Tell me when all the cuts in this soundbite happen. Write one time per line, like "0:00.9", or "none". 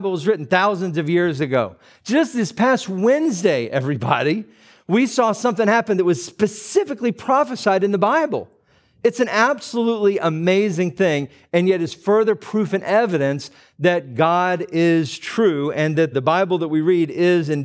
0:16.1